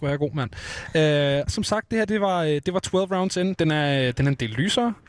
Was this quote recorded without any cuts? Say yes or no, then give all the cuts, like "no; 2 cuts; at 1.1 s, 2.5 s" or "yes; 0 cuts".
no; 2 cuts; at 1.5 s, 3.6 s